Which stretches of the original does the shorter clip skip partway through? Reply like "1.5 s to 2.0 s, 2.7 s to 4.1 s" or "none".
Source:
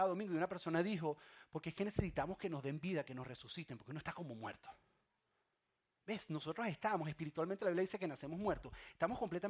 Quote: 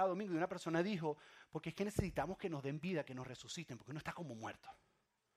none